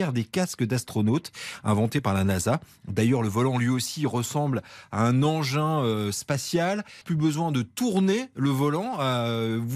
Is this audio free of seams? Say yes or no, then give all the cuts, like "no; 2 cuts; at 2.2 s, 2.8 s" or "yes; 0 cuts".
yes; 0 cuts